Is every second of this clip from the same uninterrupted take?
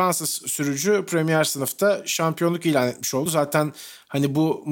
yes; 0 cuts

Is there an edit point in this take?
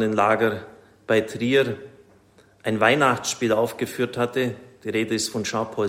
no; 0 cuts

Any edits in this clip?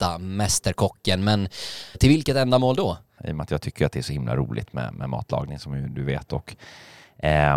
yes; 2 cuts; at 1.9 s, 3.2 s

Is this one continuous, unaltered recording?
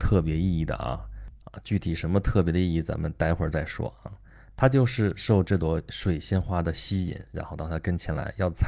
yes; 0 cuts

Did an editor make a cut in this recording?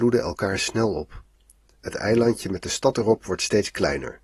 no; 0 cuts

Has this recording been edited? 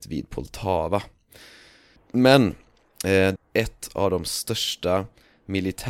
yes; 2 cuts; at 2.0 s, 3.4 s

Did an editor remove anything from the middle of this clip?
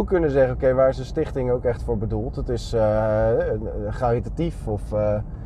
no; 0 cuts

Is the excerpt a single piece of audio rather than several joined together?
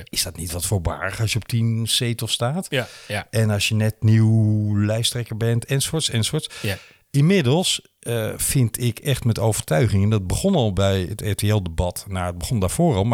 yes; 0 cuts

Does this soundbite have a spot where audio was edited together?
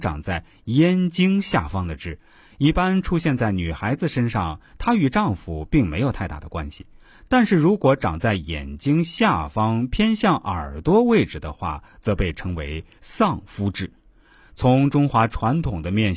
no; 0 cuts

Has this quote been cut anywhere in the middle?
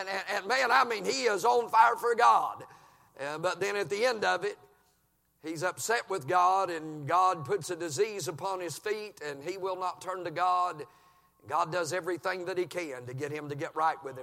no; 0 cuts

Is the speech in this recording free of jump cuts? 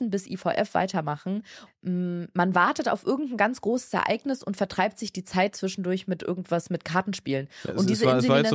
no; 1 cut; at 1.7 s

